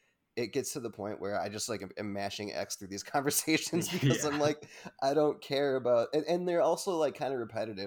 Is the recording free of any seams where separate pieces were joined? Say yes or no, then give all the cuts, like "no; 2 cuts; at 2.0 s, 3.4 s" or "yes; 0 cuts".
yes; 0 cuts